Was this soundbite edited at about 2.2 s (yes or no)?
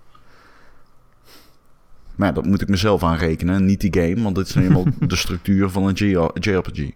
yes